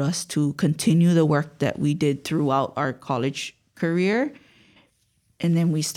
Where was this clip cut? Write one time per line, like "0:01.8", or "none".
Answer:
none